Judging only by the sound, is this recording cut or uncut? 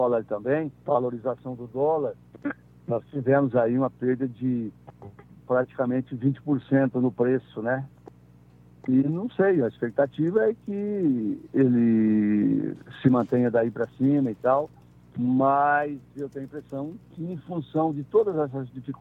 uncut